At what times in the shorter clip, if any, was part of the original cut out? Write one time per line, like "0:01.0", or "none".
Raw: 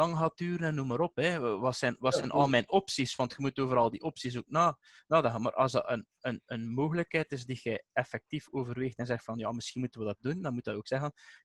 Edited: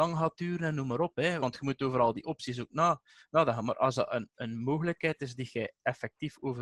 0:01.4
0:04.3